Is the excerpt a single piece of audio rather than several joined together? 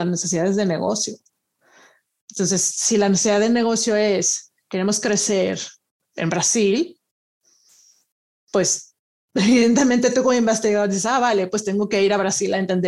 yes; 0 cuts

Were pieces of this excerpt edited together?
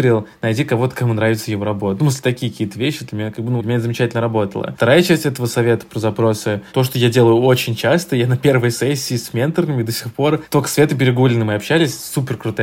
yes; 1 cut; at 3.6 s

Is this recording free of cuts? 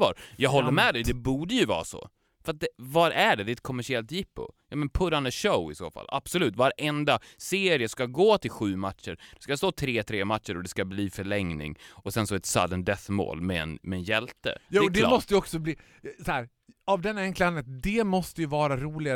yes; 0 cuts

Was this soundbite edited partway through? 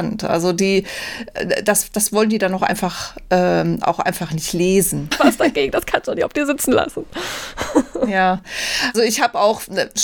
yes; 2 cuts; at 5.1 s, 8.9 s

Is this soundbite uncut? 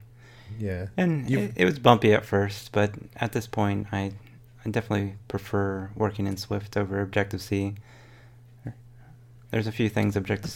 yes; 0 cuts

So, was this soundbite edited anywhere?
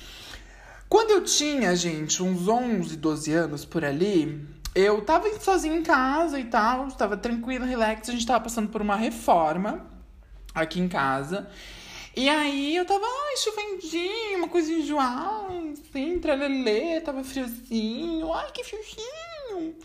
no; 0 cuts

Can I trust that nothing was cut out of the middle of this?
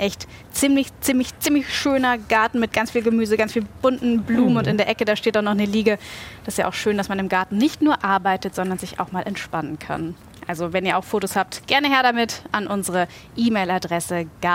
yes; 0 cuts

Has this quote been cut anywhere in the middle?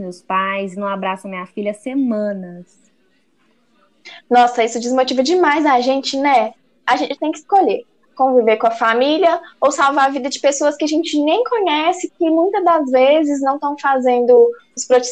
no; 0 cuts

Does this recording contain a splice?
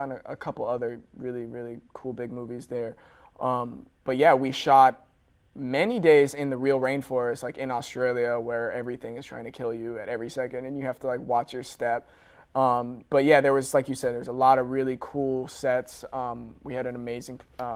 no; 0 cuts

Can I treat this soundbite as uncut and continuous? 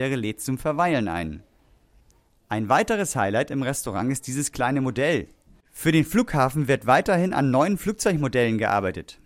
no; 1 cut; at 5.6 s

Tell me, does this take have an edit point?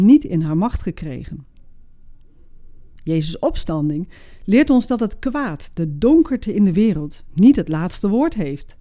yes; 1 cut; at 3.0 s

